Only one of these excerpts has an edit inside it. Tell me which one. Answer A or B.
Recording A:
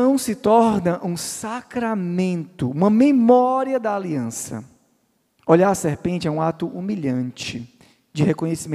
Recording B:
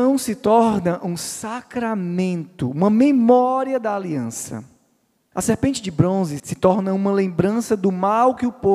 B